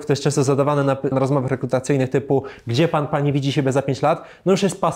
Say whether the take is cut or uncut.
cut